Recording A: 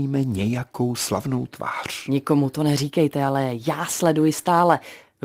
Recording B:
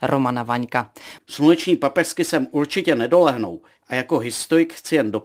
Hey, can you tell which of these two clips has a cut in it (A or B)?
B